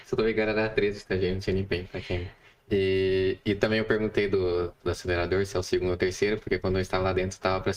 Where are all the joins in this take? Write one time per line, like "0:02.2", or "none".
0:04.8